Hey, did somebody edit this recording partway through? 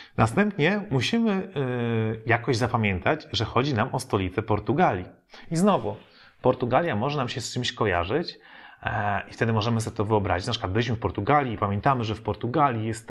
no; 0 cuts

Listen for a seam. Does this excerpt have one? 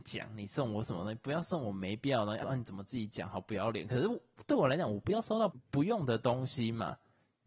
yes; 1 cut; at 2.4 s

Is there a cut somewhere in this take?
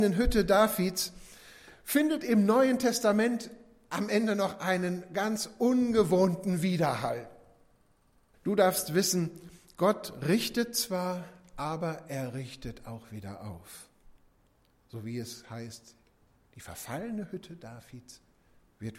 yes; 1 cut; at 8.3 s

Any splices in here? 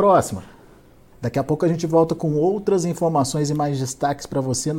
yes; 1 cut; at 1.1 s

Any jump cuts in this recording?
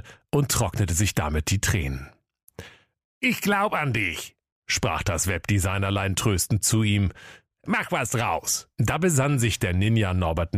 yes; 2 cuts; at 7.6 s, 8.7 s

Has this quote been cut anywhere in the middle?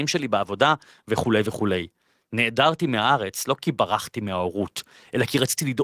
no; 0 cuts

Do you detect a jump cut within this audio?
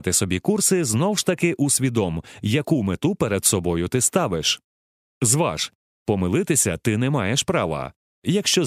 no; 0 cuts

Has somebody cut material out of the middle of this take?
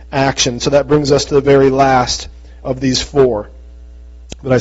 no; 0 cuts

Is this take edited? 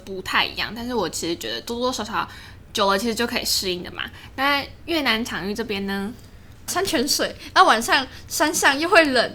yes; 1 cut; at 6.7 s

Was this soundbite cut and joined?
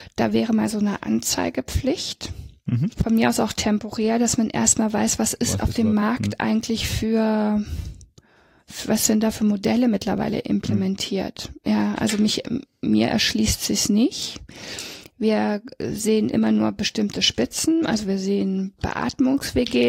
no; 0 cuts

